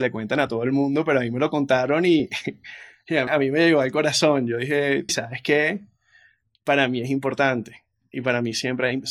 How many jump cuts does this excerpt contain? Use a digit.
2